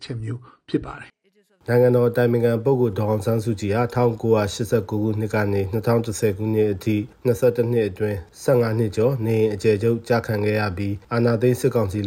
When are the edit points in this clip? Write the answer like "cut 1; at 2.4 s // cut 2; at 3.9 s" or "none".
none